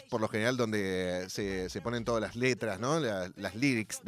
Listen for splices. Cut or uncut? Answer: uncut